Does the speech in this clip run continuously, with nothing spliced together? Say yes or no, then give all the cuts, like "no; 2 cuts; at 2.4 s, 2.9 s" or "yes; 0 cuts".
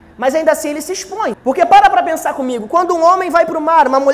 no; 1 cut; at 1.3 s